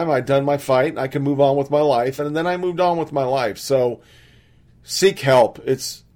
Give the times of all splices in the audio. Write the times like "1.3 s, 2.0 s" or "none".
none